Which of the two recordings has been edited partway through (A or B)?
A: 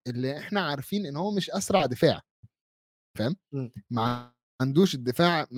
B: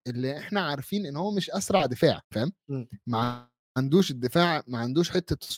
B